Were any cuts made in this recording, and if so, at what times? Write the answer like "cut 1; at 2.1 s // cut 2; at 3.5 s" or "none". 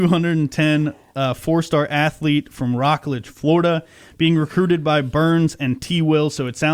none